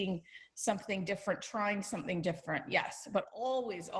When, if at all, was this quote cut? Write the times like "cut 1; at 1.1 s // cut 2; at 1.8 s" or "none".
none